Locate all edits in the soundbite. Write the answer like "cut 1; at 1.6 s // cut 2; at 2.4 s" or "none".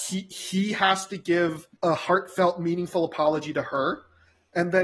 cut 1; at 1.8 s

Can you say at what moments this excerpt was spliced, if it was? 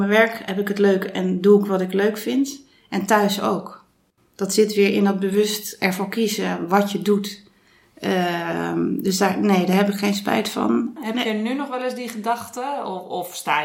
cut 1; at 11.0 s

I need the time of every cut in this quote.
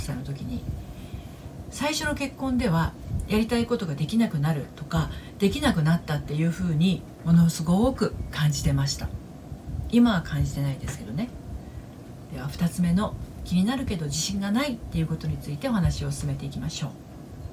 cut 1; at 12.3 s

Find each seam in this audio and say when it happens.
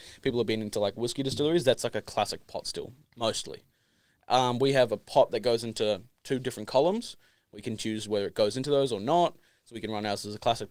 none

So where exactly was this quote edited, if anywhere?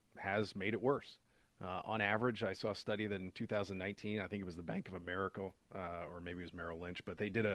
none

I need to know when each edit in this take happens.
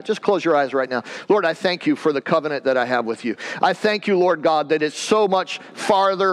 none

